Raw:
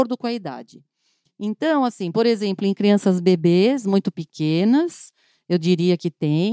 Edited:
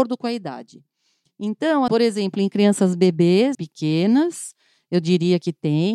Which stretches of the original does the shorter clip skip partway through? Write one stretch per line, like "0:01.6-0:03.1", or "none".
0:01.9-0:02.1
0:03.8-0:04.1